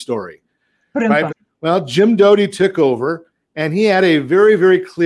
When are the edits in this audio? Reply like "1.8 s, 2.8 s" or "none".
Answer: 1.3 s